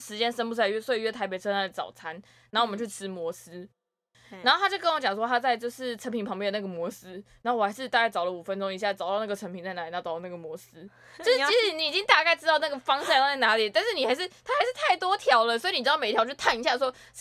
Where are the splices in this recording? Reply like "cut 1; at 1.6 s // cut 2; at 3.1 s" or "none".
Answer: none